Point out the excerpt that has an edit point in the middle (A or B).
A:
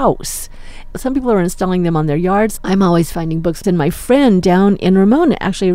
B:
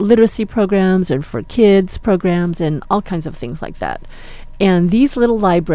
A